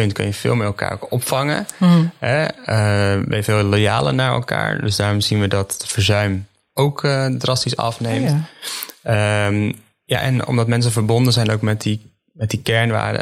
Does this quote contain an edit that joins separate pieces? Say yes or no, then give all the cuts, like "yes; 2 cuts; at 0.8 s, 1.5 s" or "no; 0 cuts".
no; 0 cuts